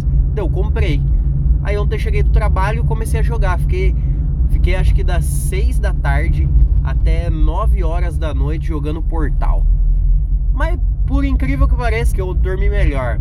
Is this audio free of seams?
no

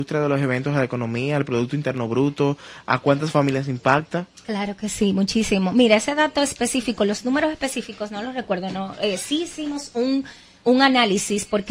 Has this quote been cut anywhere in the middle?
no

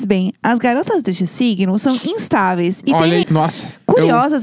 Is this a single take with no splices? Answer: no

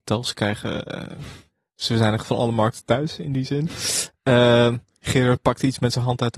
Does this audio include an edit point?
no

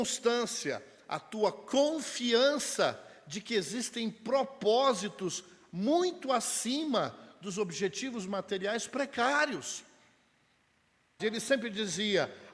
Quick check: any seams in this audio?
yes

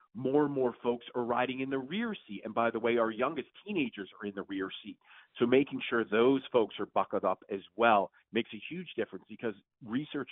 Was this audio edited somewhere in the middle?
no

